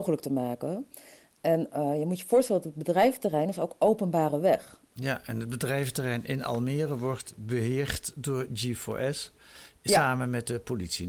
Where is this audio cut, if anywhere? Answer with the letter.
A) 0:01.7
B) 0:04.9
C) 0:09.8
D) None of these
B